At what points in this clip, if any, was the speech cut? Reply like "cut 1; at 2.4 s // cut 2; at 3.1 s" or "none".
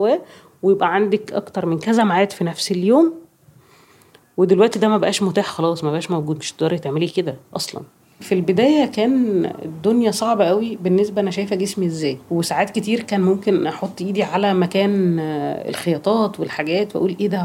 cut 1; at 8.2 s // cut 2; at 12.2 s